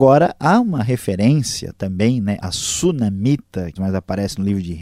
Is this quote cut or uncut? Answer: cut